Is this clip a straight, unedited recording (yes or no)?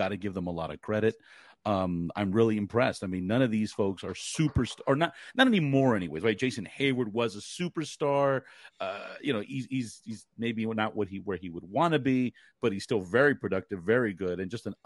yes